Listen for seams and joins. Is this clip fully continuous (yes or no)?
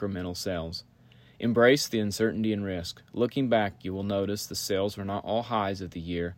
yes